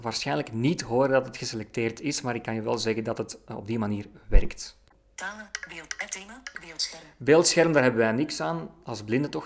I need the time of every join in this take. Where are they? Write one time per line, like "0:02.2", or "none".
none